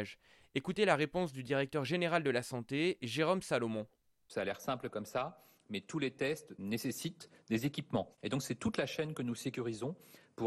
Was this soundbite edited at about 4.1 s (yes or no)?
no